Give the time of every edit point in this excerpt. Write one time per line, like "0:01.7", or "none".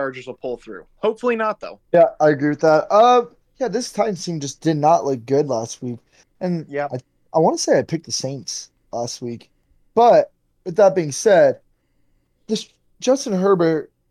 0:01.8